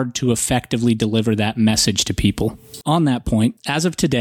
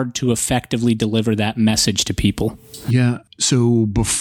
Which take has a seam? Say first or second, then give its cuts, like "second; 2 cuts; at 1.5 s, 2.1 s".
first; 1 cut; at 2.8 s